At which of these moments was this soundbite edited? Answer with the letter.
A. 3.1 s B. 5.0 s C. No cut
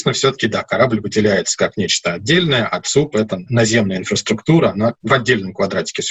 B